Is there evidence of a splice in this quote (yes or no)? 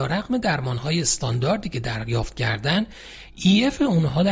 no